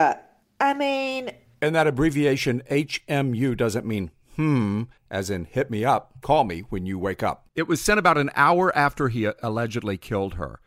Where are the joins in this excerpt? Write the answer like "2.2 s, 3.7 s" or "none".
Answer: 5.0 s